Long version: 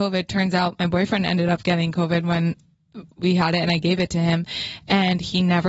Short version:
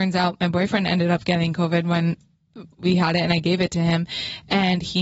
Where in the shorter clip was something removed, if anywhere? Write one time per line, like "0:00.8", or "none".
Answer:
none